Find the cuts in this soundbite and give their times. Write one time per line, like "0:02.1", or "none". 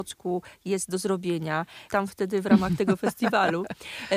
0:01.9